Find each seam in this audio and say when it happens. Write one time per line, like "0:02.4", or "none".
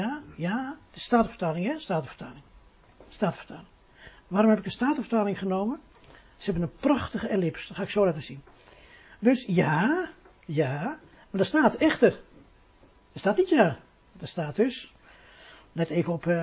0:14.1